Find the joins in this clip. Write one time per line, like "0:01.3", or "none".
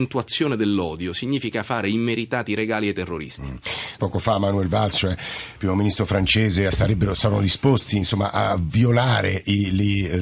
0:04.0
0:06.7